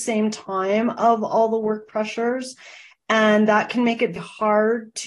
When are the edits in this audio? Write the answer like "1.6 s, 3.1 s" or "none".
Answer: 4.2 s